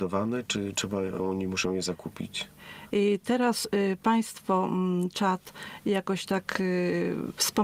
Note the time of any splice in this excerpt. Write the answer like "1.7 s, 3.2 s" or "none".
2.9 s